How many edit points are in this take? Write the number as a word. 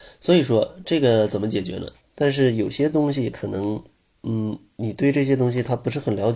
one